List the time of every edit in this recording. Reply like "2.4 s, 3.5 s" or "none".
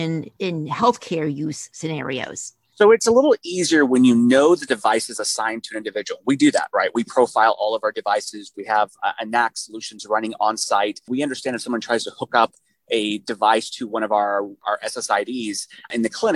8.5 s